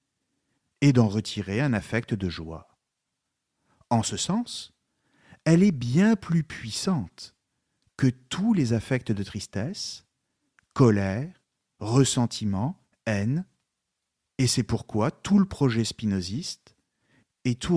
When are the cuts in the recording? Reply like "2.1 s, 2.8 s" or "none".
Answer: none